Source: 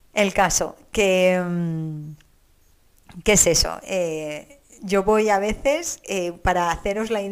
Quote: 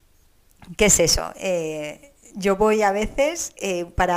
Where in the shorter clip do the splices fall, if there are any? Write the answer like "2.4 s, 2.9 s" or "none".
none

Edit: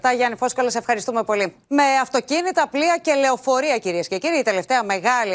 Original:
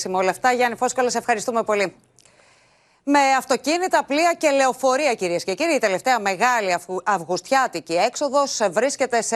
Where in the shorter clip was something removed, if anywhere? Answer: 1.6 s

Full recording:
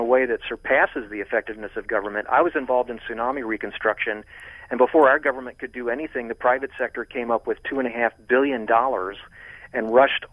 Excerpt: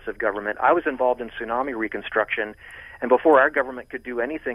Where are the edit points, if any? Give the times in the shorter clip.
none

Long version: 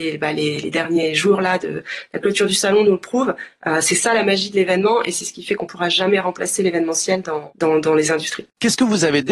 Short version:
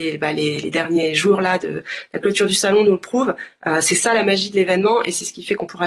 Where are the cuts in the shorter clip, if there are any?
none

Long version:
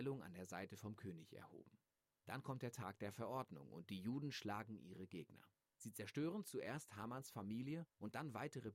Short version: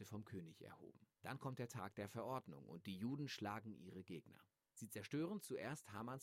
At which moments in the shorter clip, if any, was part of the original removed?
1.1 s

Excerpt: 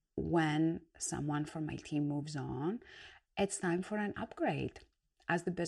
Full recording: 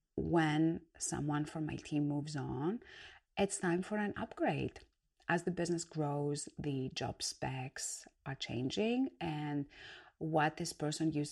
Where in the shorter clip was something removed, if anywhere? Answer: none

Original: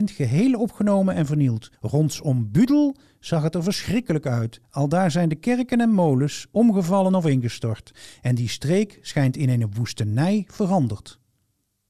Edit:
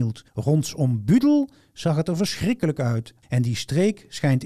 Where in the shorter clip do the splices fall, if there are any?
3.2 s

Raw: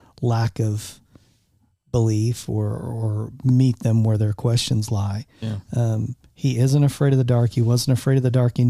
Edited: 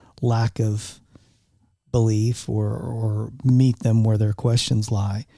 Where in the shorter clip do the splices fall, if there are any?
none

